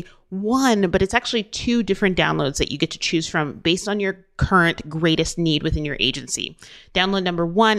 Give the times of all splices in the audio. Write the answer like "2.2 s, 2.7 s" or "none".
none